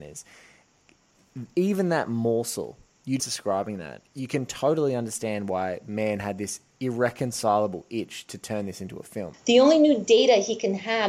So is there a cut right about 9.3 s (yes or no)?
yes